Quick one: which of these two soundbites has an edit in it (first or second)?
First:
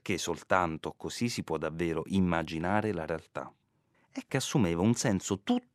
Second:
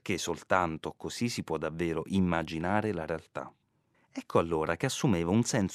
first